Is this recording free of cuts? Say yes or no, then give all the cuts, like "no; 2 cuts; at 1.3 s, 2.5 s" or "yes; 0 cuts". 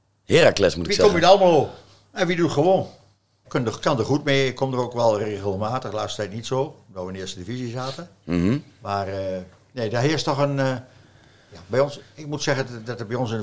no; 1 cut; at 3.4 s